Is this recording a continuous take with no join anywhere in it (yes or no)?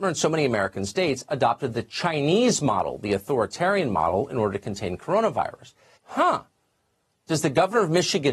no